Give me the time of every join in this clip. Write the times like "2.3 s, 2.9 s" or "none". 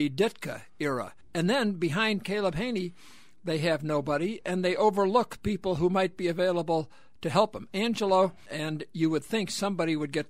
1.2 s, 8.5 s

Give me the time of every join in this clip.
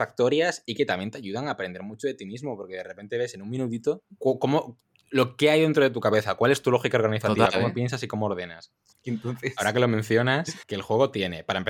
8.9 s, 10.6 s

